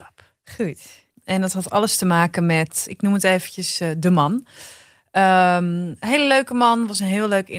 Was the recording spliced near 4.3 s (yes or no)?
no